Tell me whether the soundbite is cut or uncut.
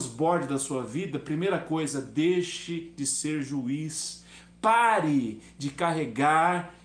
uncut